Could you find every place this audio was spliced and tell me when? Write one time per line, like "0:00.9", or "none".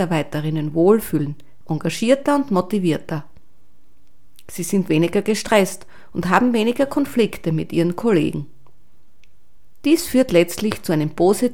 0:01.6